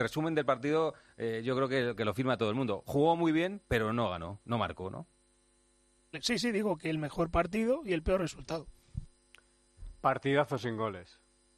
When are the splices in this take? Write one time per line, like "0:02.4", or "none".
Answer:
0:06.0